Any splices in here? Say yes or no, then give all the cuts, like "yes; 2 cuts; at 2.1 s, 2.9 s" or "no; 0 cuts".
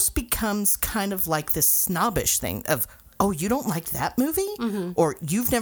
no; 0 cuts